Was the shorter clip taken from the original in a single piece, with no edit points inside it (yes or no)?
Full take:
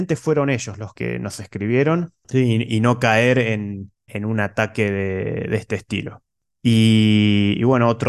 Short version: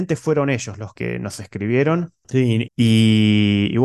no